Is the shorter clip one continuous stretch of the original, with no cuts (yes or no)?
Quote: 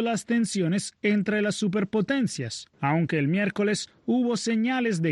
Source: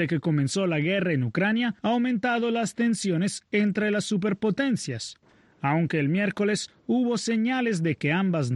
no